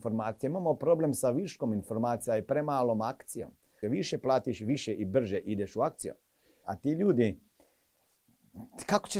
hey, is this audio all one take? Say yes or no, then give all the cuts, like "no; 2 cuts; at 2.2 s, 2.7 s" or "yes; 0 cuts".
no; 2 cuts; at 3.8 s, 6.6 s